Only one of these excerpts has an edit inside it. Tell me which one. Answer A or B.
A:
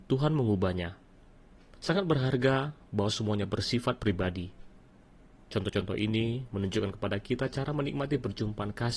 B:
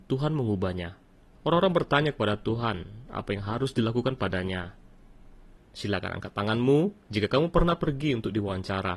B